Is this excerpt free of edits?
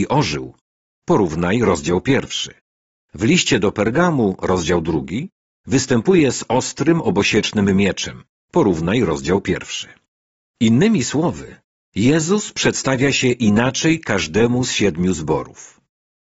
yes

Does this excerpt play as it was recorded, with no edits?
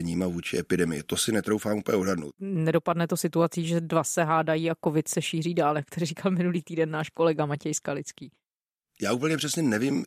no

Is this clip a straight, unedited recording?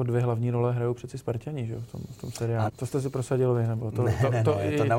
no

